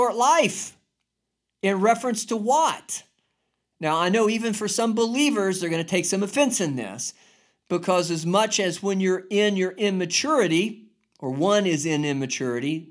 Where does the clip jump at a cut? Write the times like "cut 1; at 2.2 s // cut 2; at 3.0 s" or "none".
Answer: cut 1; at 3.7 s